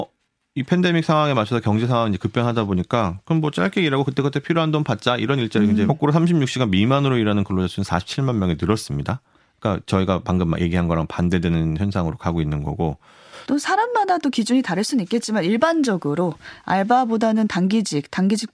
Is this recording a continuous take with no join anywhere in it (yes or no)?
no